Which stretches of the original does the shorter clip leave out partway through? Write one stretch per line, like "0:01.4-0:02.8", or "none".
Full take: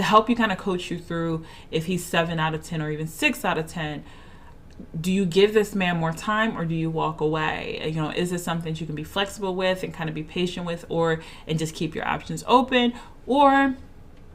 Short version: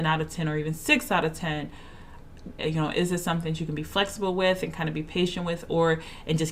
0:04.9-0:07.8